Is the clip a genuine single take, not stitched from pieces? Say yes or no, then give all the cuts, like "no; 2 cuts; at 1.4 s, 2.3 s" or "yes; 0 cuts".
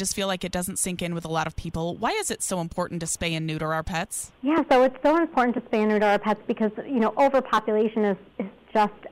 yes; 0 cuts